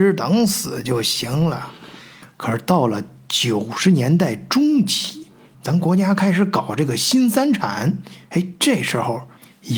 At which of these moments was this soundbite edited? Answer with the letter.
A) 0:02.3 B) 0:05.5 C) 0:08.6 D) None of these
B